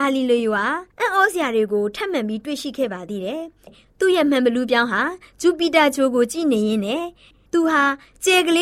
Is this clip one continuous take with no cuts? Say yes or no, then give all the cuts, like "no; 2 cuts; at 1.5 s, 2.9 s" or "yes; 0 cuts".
yes; 0 cuts